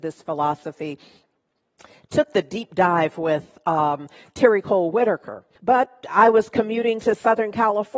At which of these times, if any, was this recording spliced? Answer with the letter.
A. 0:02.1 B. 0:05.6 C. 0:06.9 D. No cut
B